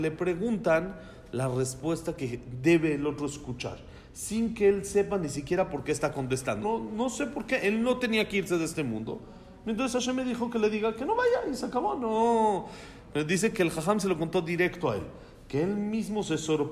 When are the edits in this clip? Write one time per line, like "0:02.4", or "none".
0:06.6